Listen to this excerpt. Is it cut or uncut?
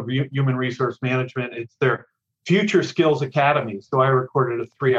uncut